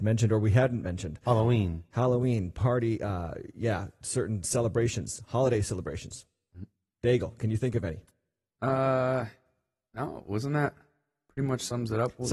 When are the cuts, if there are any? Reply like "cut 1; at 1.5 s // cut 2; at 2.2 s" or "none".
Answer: none